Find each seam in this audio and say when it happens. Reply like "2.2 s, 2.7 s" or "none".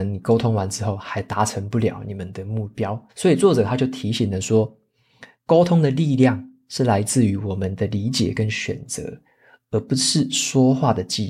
3.1 s